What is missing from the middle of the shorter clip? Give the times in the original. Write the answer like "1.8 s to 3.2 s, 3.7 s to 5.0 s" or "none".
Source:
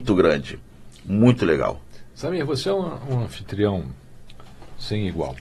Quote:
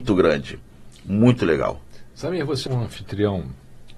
2.7 s to 3.1 s